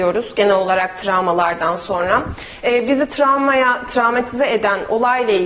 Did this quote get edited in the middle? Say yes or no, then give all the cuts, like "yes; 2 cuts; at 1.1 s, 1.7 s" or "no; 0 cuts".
no; 0 cuts